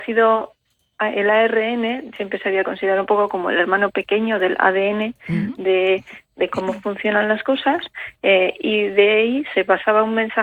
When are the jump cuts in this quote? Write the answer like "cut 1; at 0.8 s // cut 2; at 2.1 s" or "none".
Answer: cut 1; at 5.6 s